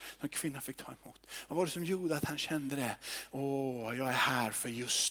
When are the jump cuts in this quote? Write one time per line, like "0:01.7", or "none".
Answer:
0:03.3